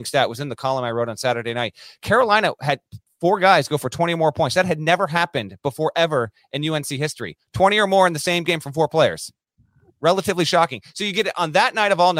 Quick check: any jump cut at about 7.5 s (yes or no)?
no